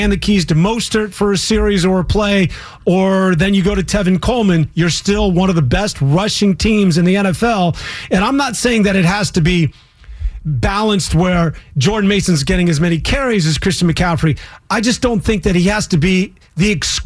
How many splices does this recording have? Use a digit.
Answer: 0